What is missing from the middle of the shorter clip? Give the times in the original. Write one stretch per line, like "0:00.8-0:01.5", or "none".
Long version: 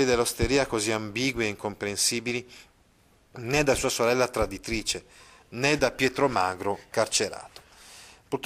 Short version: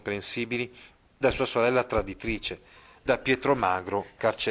0:03.0-0:03.6
0:05.5-0:05.8